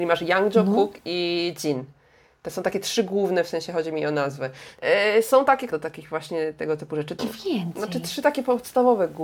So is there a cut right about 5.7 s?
yes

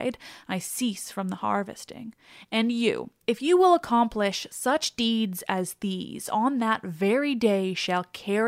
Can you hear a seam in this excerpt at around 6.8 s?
no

